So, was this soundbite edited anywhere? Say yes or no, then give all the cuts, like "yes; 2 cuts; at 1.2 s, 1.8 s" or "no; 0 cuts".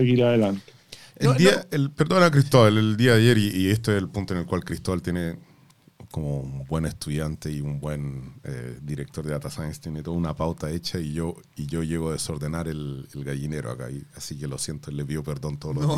no; 0 cuts